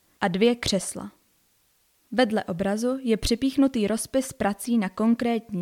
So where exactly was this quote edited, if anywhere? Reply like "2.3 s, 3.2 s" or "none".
none